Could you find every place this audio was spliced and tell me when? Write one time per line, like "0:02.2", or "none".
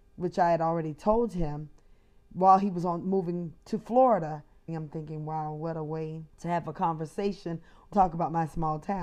0:04.7
0:06.3
0:07.9